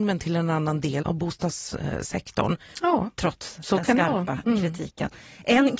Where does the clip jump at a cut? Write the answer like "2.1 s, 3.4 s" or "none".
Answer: 1.0 s, 2.7 s